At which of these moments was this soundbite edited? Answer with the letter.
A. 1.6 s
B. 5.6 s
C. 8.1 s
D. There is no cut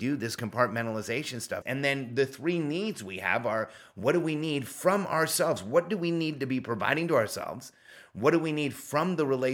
A